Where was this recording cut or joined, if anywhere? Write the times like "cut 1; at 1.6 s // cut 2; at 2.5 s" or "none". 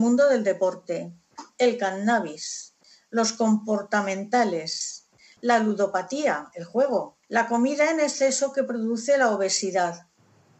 cut 1; at 5.4 s // cut 2; at 7.2 s